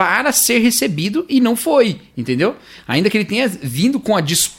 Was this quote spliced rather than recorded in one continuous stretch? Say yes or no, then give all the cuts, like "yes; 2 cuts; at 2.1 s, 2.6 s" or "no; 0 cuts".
no; 0 cuts